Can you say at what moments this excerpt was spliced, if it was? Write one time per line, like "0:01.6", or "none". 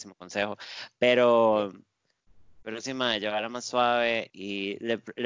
0:04.3